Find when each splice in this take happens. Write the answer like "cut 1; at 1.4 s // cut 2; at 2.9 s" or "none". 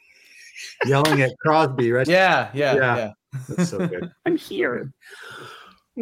cut 1; at 2.0 s // cut 2; at 4.2 s

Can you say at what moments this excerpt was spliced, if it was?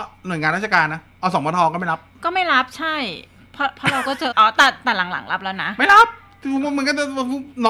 cut 1; at 4.3 s

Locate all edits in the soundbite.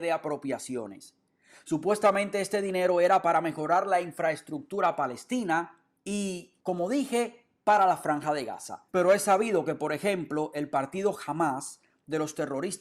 cut 1; at 8.9 s

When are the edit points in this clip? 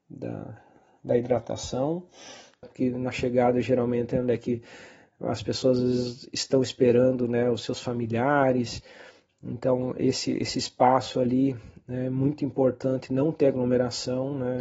cut 1; at 2.6 s

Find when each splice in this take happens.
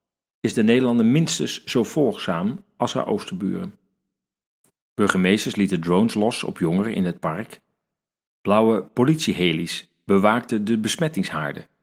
cut 1; at 4.8 s

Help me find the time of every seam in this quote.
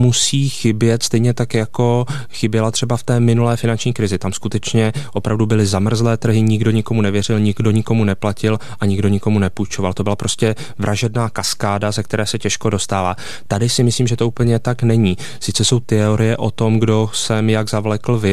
none

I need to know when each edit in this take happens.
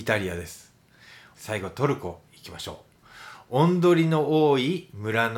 cut 1; at 1.3 s

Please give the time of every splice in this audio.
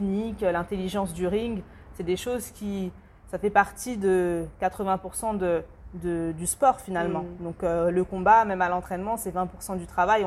none

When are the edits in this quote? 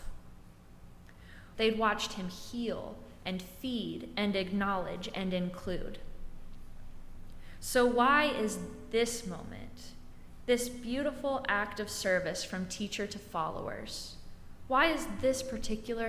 cut 1; at 1.5 s

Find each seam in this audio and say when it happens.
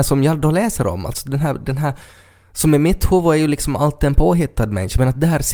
none

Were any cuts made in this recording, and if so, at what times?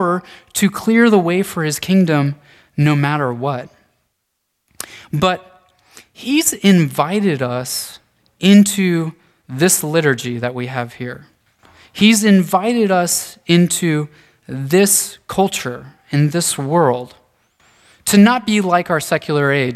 none

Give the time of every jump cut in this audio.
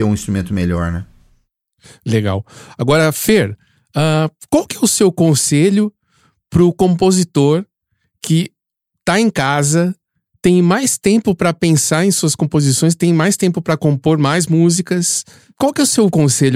none

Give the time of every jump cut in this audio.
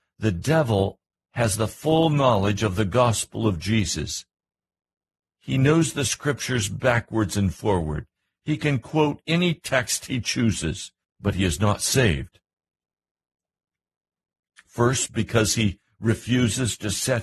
cut 1; at 11.0 s

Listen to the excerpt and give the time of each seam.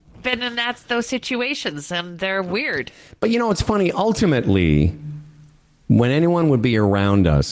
none

